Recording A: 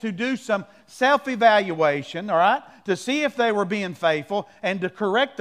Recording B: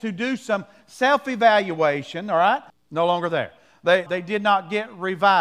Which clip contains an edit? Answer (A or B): B